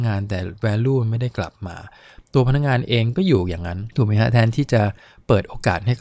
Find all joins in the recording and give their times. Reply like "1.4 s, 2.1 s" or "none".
3.9 s